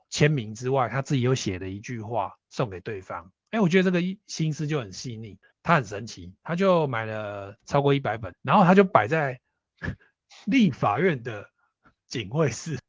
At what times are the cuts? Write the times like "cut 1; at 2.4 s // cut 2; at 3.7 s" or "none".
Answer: cut 1; at 5.5 s // cut 2; at 8.3 s